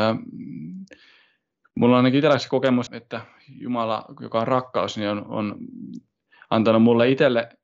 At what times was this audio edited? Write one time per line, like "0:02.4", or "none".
0:02.9